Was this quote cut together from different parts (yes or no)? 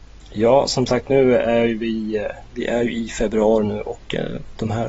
no